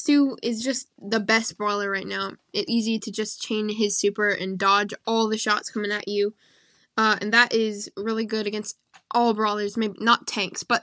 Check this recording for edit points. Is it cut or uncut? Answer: cut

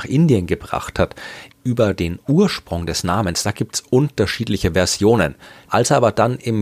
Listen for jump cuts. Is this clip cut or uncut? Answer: cut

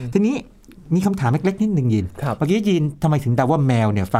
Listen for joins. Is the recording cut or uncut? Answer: uncut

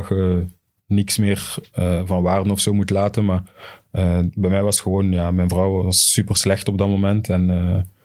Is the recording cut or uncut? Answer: uncut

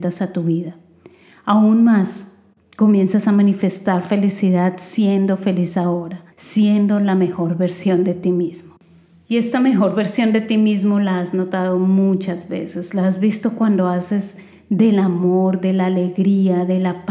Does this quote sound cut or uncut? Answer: cut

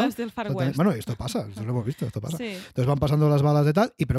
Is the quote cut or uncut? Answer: uncut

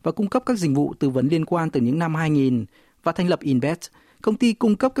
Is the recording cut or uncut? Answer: uncut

